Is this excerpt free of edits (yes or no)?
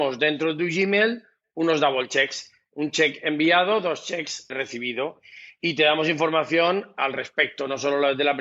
no